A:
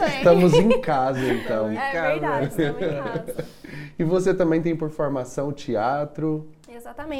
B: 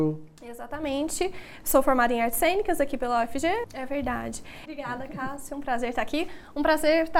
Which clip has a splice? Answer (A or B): B